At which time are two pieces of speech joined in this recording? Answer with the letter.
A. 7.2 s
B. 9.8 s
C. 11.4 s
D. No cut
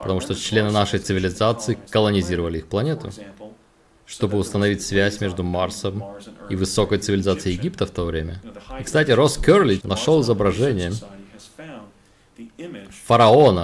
B